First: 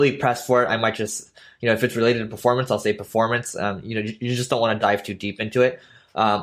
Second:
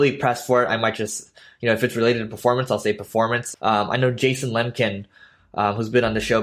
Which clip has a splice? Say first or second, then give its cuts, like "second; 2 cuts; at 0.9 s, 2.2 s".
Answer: second; 1 cut; at 3.5 s